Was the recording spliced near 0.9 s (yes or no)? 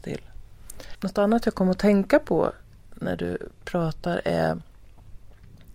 yes